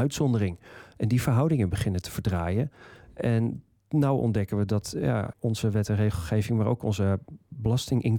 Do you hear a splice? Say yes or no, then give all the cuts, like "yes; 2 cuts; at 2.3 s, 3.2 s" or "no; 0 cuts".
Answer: yes; 1 cut; at 5.3 s